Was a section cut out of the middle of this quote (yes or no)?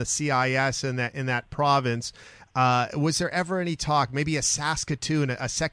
no